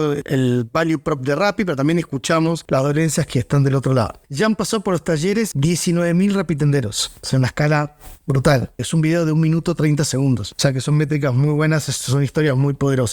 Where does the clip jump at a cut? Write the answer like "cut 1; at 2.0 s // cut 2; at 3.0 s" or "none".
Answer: cut 1; at 5.5 s // cut 2; at 8.8 s